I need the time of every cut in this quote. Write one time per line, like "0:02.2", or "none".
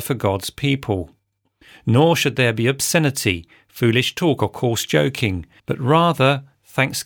0:05.6